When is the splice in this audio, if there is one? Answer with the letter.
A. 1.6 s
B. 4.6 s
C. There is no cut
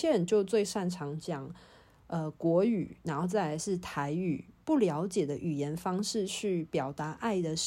B